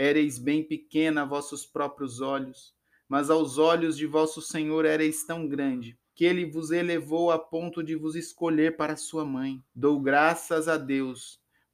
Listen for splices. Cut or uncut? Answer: cut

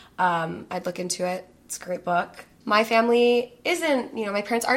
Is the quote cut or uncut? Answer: cut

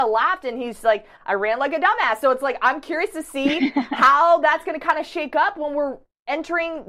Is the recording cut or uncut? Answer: cut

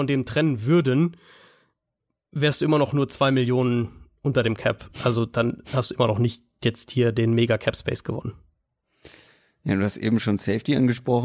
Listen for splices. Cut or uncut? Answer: uncut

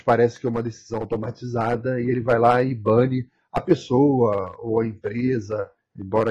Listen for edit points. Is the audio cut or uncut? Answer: uncut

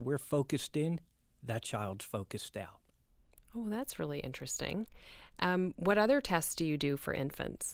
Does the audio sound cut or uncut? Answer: uncut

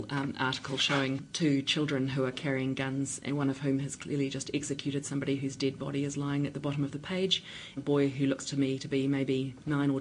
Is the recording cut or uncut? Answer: cut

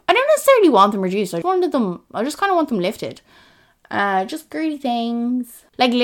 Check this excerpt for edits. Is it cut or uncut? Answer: cut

